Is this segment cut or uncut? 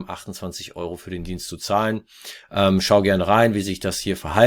uncut